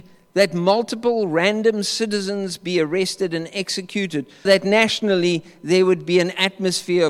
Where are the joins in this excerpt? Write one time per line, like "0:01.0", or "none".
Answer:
0:04.4